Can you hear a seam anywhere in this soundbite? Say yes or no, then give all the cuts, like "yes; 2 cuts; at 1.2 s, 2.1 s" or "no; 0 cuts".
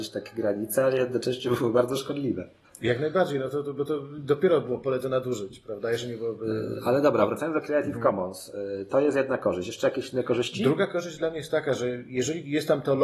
no; 0 cuts